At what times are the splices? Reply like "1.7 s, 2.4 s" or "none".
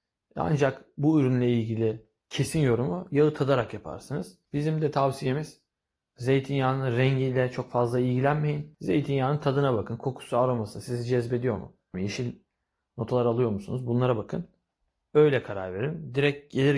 11.9 s